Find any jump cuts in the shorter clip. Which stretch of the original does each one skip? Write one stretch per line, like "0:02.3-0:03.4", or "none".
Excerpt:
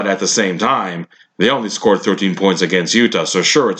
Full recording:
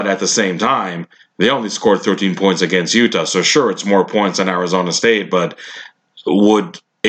none